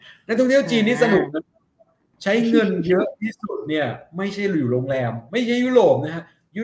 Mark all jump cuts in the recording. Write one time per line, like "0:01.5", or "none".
none